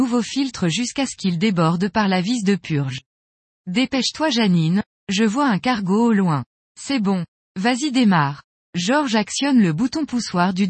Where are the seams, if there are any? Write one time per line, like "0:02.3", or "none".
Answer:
none

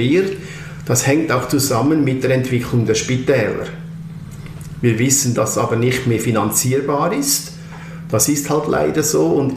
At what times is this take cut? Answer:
0:05.4

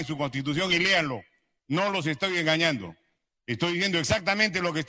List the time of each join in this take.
none

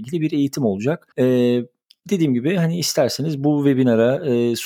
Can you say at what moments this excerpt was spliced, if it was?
0:01.1

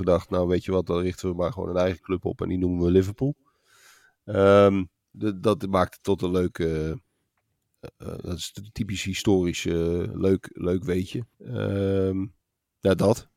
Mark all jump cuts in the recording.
0:05.1
0:11.3

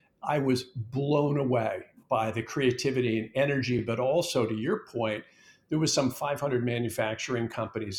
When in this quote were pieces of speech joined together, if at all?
none

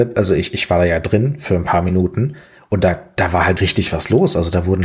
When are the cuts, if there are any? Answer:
0:03.6

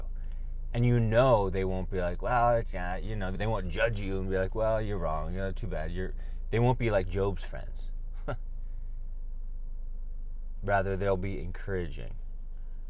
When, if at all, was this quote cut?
0:03.3

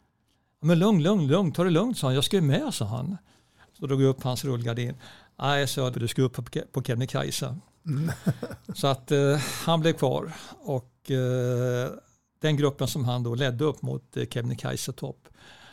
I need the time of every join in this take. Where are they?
0:05.9

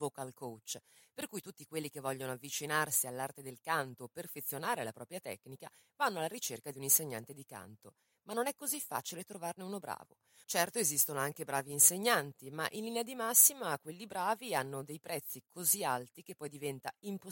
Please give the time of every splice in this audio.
0:10.4

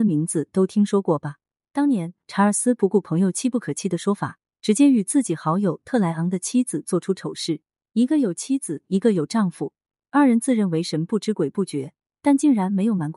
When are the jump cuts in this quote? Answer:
0:01.6

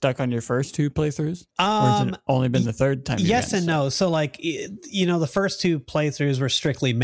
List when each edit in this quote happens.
0:01.5

